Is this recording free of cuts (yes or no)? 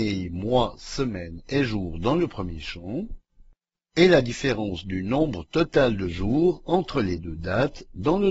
yes